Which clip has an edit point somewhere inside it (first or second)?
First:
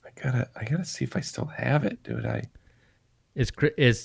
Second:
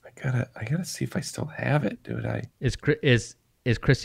second